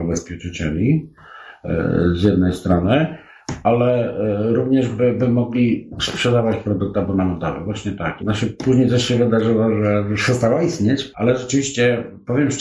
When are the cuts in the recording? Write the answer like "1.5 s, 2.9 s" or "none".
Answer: 8.2 s, 11.1 s